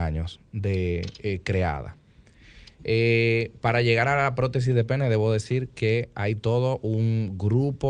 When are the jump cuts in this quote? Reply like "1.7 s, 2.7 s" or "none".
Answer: none